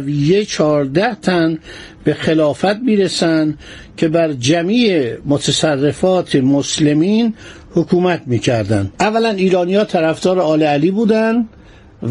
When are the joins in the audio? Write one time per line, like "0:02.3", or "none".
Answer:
0:08.9